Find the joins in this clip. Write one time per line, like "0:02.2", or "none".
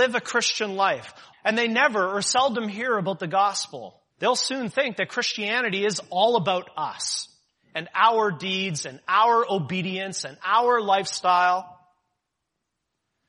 0:01.3
0:04.1